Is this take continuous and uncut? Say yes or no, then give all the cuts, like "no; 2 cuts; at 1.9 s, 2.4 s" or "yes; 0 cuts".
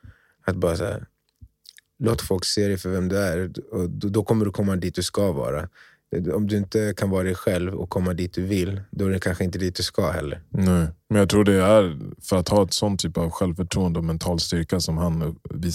yes; 0 cuts